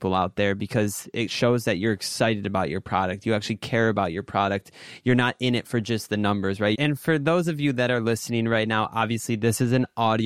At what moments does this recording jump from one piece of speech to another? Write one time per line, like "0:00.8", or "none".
0:06.7